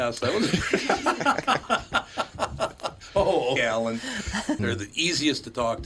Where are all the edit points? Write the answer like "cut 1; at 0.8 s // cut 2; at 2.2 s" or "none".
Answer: cut 1; at 3.6 s // cut 2; at 4.6 s